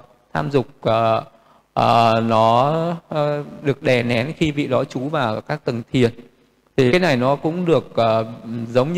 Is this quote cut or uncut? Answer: cut